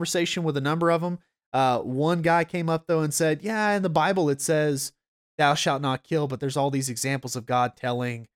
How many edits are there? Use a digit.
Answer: 0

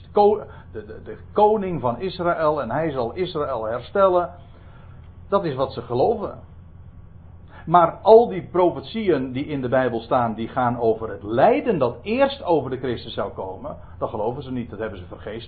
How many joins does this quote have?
0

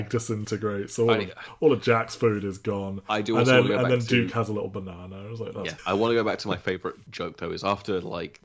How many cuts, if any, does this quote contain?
1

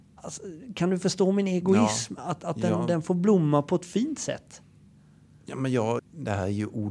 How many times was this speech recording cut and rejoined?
1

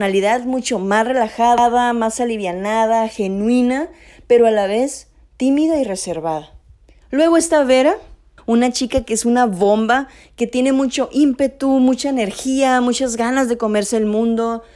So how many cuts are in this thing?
2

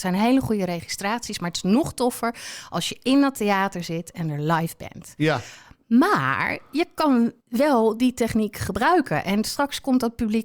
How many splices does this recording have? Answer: 1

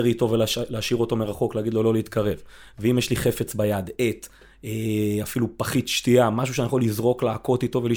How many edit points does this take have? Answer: 0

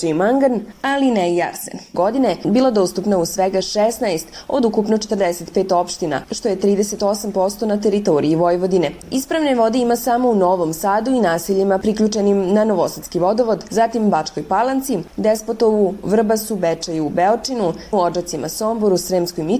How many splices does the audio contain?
2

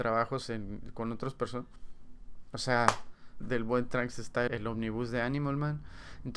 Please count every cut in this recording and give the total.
2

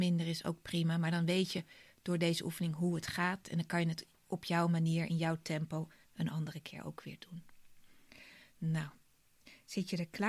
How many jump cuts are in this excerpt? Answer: 0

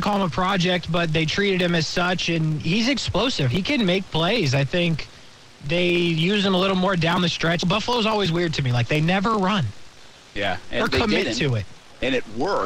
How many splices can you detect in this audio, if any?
1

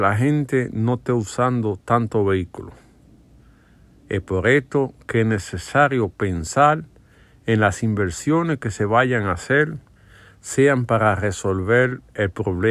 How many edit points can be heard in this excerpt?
0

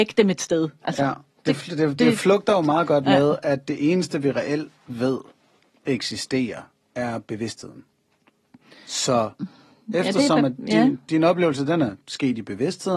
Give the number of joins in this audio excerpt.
0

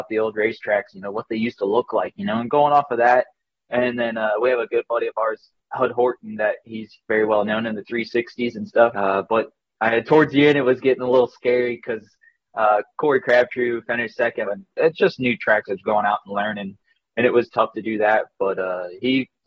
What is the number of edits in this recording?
2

